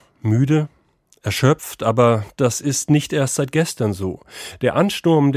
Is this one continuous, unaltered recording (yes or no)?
yes